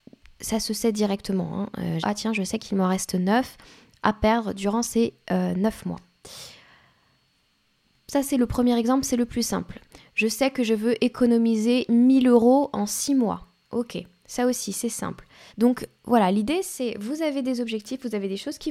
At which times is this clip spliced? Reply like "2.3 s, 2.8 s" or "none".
2.0 s, 15.5 s

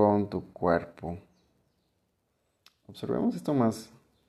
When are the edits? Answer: none

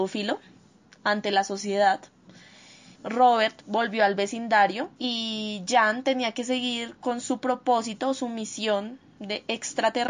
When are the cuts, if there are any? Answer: 3.0 s, 5.0 s

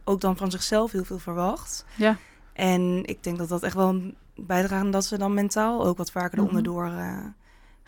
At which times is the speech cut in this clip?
none

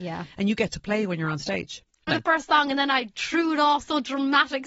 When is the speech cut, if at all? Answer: 2.1 s

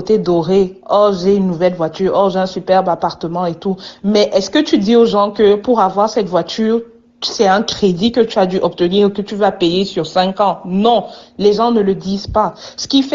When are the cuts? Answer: none

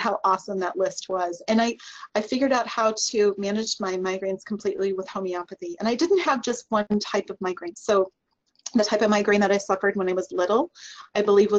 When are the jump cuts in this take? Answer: 7.7 s

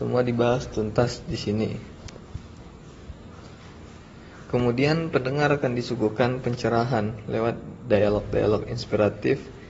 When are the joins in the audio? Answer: none

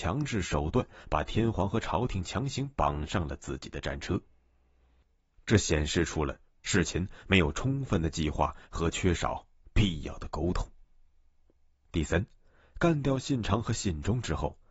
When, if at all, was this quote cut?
none

